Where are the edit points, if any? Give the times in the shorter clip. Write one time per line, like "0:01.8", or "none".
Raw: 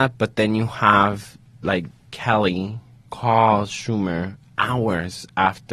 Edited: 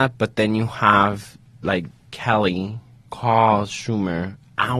none